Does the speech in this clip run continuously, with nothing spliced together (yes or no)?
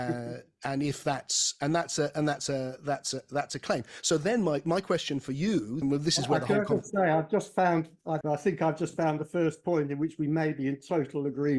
no